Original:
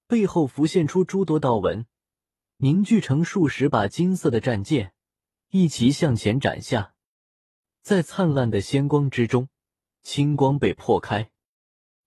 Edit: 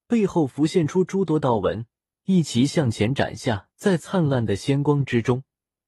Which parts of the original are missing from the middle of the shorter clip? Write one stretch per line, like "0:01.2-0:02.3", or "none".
0:02.2-0:05.5
0:07.0-0:07.8